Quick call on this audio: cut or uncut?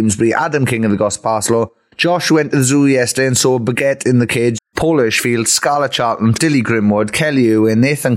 cut